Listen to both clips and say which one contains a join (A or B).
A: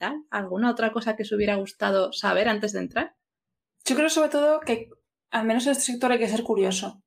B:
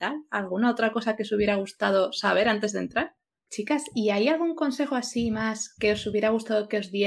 B